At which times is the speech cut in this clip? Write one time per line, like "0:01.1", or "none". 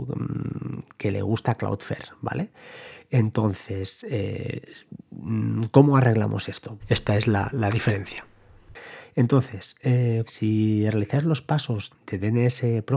0:06.8
0:10.3
0:11.9

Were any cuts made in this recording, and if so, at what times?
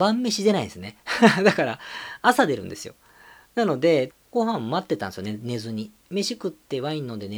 0:04.1

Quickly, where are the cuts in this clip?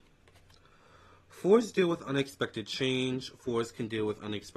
none

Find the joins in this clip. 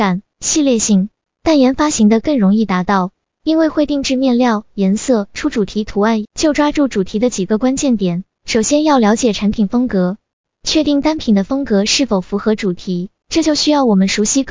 0:06.2

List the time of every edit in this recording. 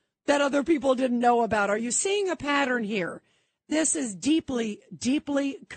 none

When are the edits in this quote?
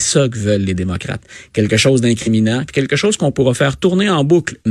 0:02.7

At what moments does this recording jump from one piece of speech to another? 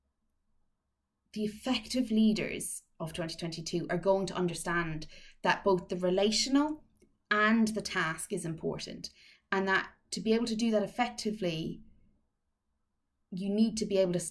none

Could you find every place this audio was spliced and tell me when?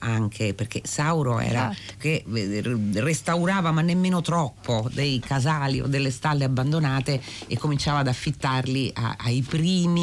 0:02.0

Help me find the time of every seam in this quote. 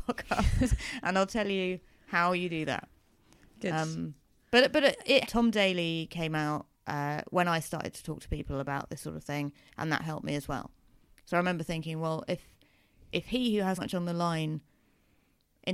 0:05.2
0:06.7
0:13.8

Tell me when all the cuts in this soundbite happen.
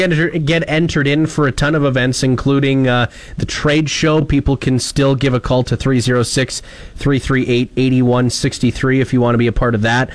none

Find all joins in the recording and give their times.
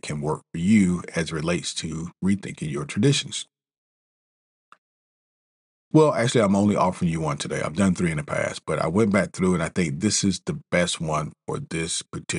0:05.9

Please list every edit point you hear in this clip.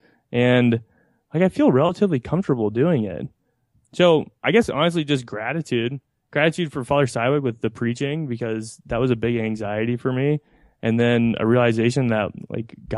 0:03.7

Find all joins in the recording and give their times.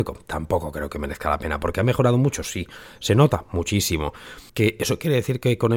0:04.5

